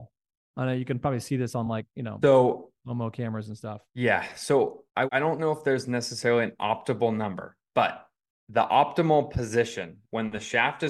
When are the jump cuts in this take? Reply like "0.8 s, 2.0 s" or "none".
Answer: none